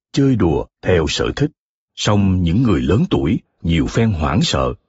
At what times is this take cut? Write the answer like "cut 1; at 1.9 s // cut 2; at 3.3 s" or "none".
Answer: cut 1; at 1.9 s // cut 2; at 3.5 s

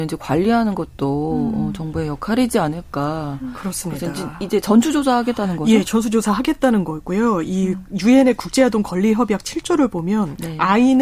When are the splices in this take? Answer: none

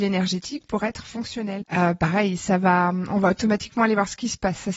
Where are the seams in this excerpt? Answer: cut 1; at 1.6 s

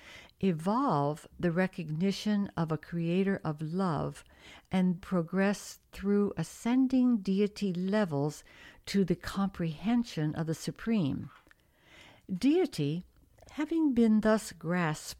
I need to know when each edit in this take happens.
cut 1; at 5.0 s

